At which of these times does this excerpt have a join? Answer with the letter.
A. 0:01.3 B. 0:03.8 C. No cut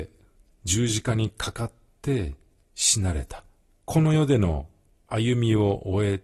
B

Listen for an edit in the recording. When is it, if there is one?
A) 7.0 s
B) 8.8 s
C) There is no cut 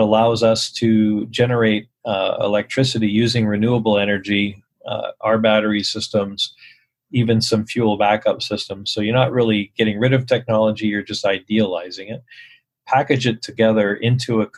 C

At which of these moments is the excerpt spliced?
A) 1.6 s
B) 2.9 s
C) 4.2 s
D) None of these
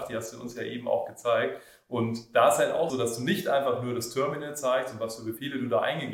B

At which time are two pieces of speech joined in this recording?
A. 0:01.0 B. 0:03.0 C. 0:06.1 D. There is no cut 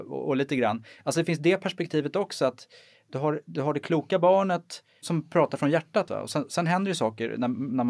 D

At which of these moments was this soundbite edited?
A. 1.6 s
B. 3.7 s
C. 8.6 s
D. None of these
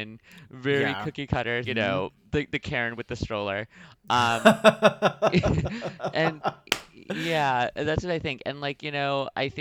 A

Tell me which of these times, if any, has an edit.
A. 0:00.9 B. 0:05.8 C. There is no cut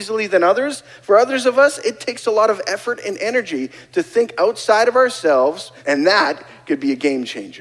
B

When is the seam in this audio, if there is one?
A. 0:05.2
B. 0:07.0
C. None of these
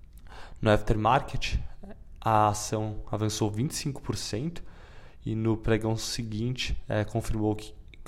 C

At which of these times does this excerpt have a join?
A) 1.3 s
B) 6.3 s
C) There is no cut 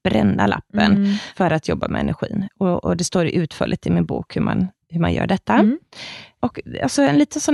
C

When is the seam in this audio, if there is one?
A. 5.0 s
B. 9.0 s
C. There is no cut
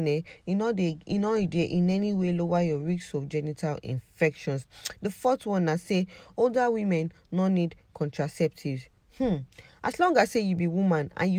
C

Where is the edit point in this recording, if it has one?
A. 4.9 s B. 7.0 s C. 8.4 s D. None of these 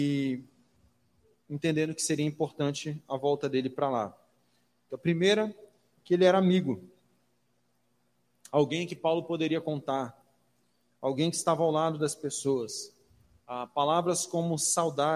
A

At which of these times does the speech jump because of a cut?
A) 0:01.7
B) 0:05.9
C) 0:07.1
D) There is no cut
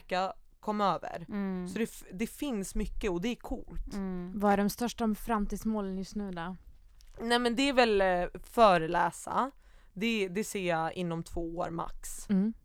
D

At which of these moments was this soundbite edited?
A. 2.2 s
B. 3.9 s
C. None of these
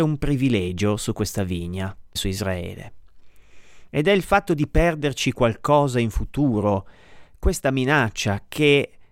A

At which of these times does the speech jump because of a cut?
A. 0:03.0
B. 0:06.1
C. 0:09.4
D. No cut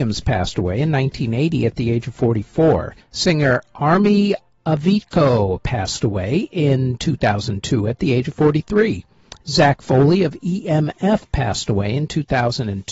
A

